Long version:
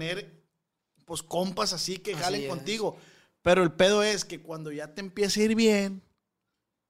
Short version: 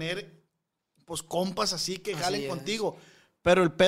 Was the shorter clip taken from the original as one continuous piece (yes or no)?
yes